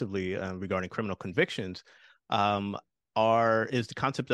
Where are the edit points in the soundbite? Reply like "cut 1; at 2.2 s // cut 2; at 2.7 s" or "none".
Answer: none